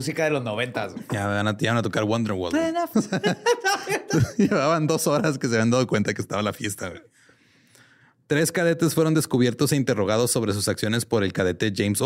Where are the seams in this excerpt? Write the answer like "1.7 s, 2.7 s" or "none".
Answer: 2.9 s

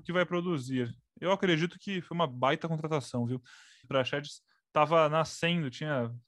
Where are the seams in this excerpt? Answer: 3.8 s

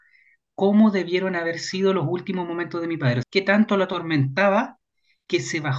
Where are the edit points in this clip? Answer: 3.2 s

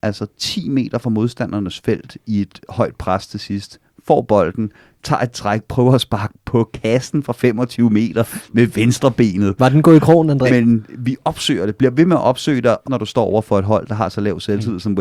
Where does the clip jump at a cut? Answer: 10.5 s, 12.8 s

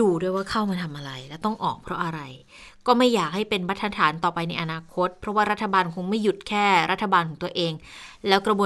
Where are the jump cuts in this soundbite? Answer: none

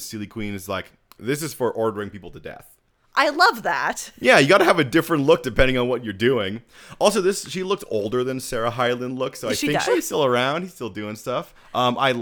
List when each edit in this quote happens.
1.2 s, 9.9 s

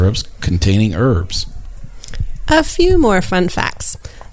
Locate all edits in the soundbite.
none

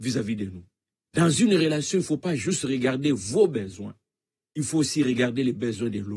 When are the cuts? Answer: none

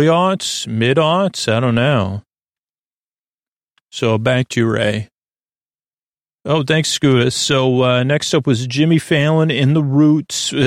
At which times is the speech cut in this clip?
none

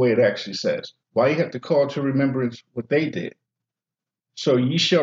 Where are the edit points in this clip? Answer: 1.0 s

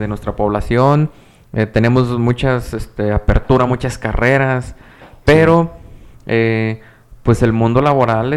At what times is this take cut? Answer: none

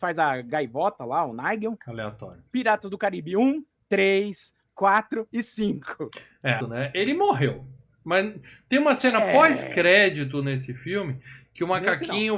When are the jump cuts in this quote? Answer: 3.8 s, 6.6 s

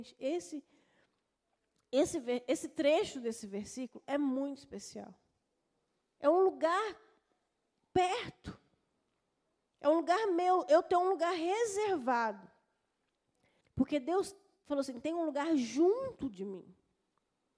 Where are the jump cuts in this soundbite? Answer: 6.0 s, 13.6 s

